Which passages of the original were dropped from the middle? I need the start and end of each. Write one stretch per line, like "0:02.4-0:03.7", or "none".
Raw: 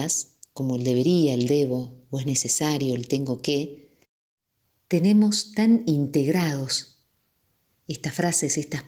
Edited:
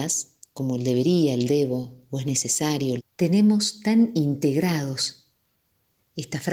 0:03.0-0:04.7